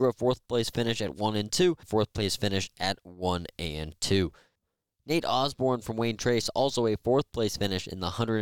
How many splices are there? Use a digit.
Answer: 1